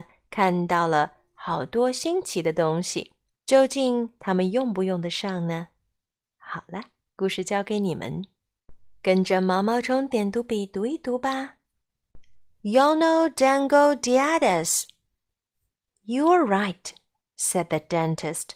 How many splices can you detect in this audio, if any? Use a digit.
2